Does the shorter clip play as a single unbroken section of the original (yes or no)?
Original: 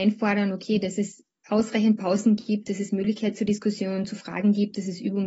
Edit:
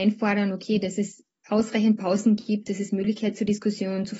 yes